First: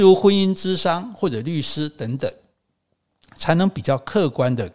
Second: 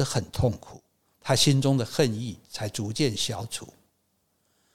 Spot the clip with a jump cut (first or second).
second